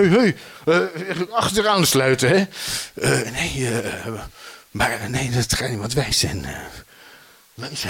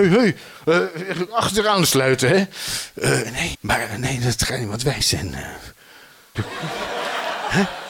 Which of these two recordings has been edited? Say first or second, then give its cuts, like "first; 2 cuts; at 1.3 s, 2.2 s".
second; 2 cuts; at 3.5 s, 6.3 s